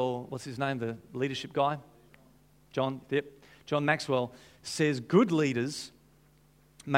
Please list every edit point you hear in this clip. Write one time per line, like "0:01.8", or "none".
none